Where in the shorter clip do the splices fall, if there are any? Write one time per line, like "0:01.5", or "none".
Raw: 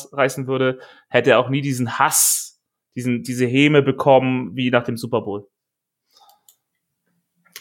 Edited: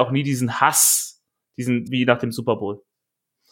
0:01.9